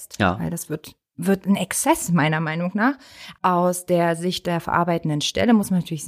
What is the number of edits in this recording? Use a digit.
1